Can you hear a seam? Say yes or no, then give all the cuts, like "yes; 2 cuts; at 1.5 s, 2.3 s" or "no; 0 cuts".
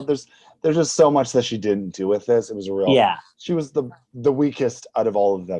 no; 0 cuts